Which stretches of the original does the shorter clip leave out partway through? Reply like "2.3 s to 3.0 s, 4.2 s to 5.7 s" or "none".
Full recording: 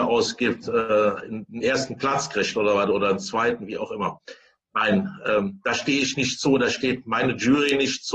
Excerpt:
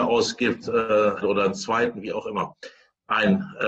1.2 s to 2.9 s